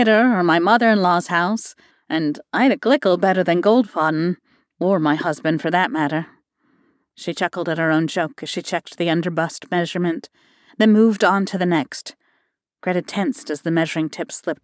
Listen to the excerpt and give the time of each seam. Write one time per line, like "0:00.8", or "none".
0:01.9